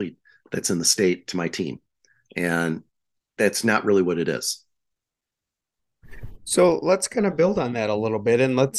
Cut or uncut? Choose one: uncut